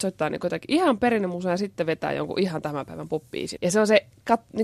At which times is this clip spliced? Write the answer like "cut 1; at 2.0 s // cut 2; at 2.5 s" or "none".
cut 1; at 3.6 s

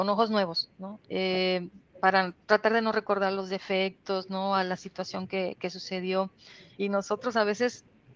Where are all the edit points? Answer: cut 1; at 1.0 s // cut 2; at 6.7 s

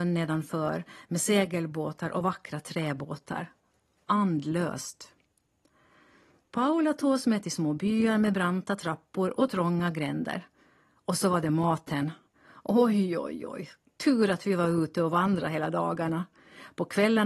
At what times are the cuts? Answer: none

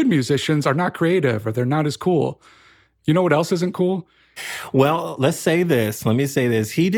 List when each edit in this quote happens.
cut 1; at 4.4 s

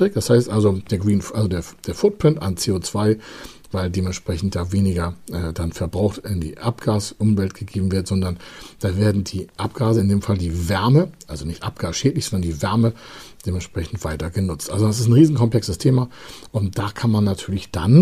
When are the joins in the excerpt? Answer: none

